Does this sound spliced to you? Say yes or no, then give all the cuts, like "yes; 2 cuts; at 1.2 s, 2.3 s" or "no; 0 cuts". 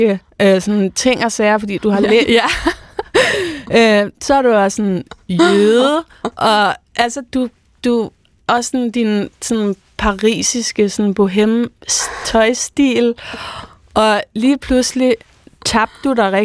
yes; 2 cuts; at 2.2 s, 7.3 s